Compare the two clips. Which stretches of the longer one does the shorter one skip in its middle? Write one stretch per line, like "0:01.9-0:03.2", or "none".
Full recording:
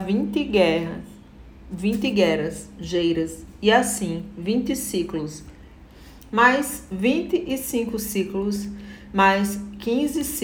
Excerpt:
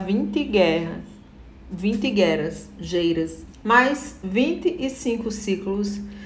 0:03.5-0:06.2